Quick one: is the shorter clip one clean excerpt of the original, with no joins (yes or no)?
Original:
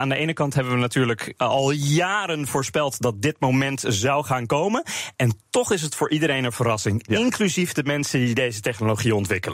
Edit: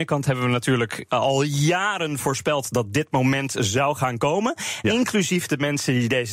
no